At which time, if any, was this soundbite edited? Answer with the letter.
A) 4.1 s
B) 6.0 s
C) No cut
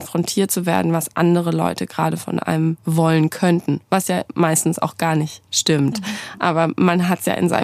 C